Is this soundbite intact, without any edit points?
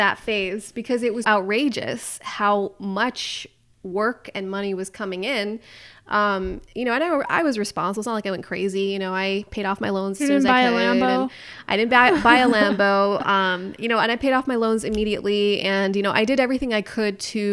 no; 1 cut; at 1.2 s

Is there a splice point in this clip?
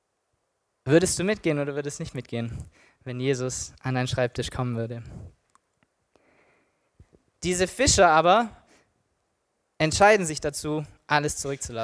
no; 0 cuts

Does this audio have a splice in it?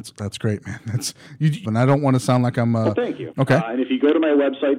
yes; 2 cuts; at 1.6 s, 3.3 s

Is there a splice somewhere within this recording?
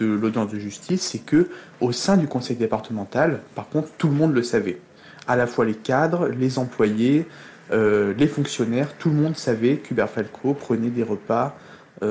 no; 0 cuts

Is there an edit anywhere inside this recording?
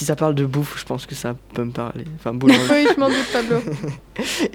yes; 1 cut; at 2.7 s

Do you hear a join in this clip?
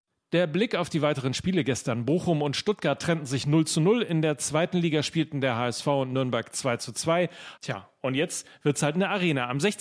yes; 1 cut; at 7.6 s

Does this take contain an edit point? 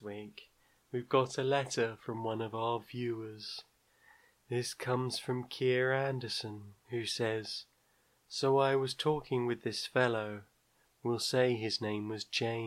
no; 0 cuts

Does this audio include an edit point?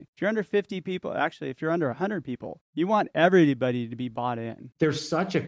no; 0 cuts

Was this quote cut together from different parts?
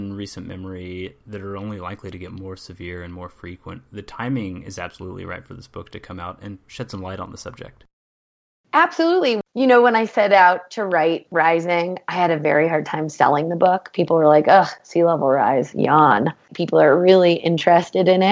yes; 1 cut; at 16.5 s

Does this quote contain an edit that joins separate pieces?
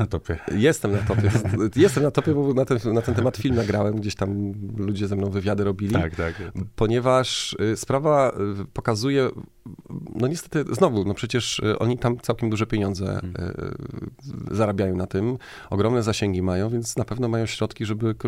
no; 0 cuts

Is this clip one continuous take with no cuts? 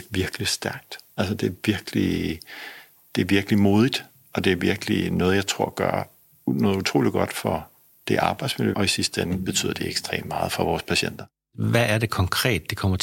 no; 1 cut; at 8.7 s

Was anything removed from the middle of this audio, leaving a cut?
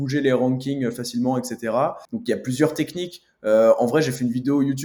yes; 1 cut; at 2.1 s

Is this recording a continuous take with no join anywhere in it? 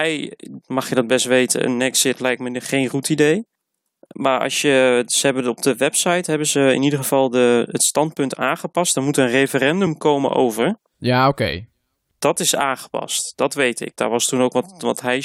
yes; 0 cuts

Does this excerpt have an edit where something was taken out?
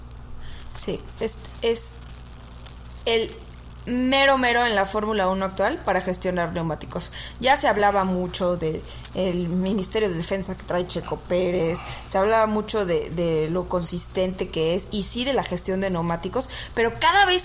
no; 0 cuts

